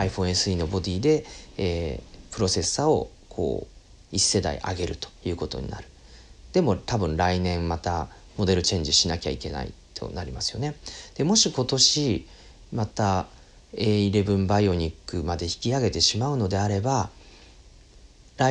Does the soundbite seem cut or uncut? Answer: cut